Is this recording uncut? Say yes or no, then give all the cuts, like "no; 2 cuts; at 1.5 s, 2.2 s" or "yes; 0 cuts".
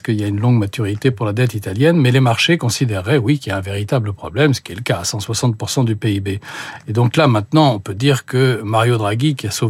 yes; 0 cuts